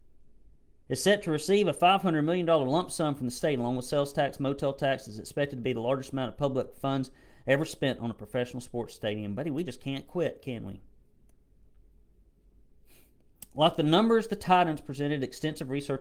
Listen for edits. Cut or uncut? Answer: uncut